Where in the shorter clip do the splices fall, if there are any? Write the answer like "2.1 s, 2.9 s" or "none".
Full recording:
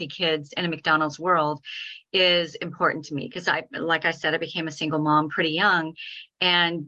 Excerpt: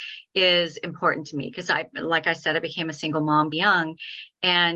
3.5 s